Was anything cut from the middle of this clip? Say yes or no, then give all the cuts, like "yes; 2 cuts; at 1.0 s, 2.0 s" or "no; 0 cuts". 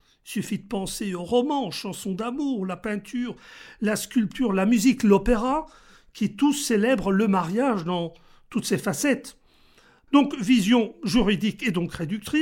yes; 1 cut; at 10.1 s